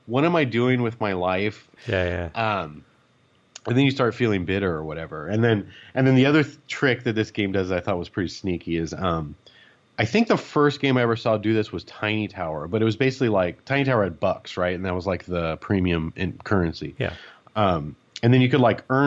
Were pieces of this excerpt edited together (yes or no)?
yes